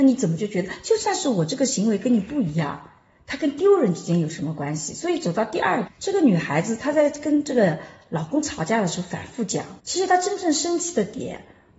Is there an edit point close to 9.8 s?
yes; 2 cuts; at 5.9 s, 9.8 s

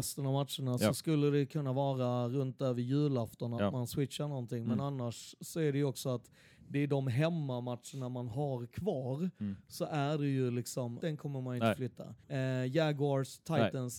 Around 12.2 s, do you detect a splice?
yes; 2 cuts; at 11.0 s, 12.2 s

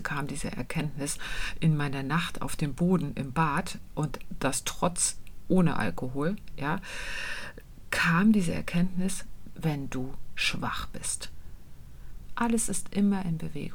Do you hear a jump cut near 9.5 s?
yes; 2 cuts; at 9.5 s, 12.3 s

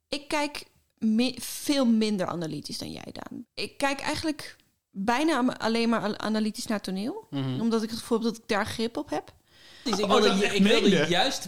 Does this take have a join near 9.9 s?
yes; 2 cuts; at 3.4 s, 9.9 s

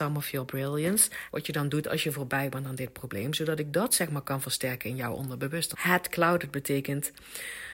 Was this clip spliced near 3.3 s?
no; 2 cuts; at 1.3 s, 5.7 s

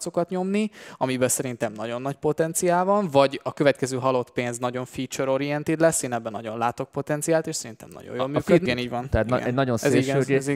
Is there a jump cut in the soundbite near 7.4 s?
no; 1 cut; at 8.7 s

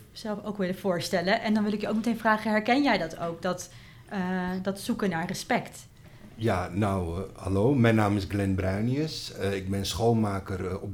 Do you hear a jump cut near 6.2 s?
no; 0 cuts

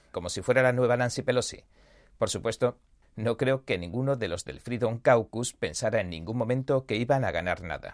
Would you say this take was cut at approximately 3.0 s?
yes; 1 cut; at 3.0 s

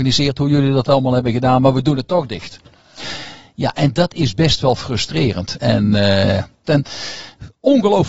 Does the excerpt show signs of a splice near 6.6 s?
yes; 1 cut; at 6.6 s

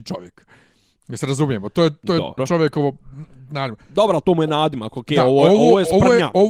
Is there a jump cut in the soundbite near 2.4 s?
yes; 1 cut; at 2.4 s

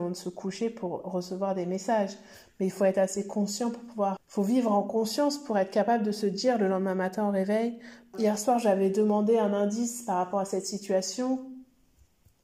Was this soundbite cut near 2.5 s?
no; 2 cuts; at 4.2 s, 8.1 s

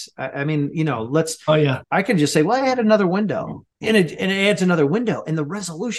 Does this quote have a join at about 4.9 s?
no; 2 cuts; at 1.8 s, 3.7 s

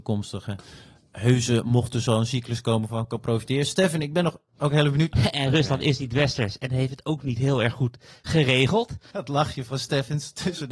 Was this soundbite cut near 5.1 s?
yes; 2 cuts; at 5.1 s, 9.1 s

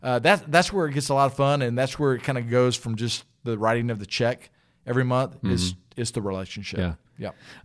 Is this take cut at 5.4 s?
no; 0 cuts

